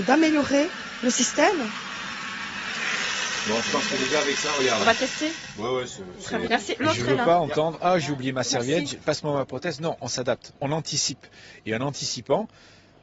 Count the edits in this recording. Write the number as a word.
two